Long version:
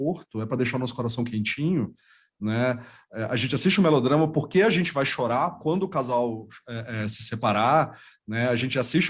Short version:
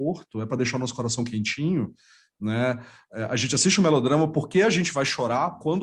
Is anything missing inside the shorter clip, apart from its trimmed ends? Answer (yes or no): no